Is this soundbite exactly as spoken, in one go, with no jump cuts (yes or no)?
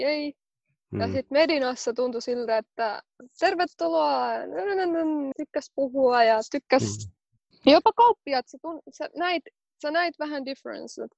no